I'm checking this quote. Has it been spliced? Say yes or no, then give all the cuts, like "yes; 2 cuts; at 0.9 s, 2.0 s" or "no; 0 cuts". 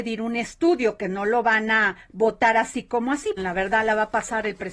yes; 1 cut; at 3.4 s